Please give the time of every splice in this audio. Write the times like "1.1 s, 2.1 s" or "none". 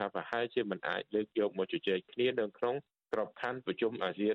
none